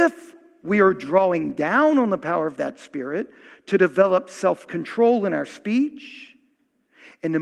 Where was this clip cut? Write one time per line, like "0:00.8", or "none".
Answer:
none